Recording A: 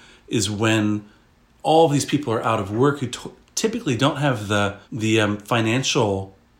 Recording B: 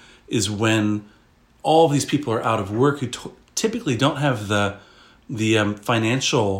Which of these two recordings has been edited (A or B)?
A